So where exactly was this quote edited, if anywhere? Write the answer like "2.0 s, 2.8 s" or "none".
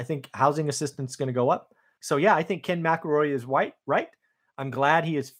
2.0 s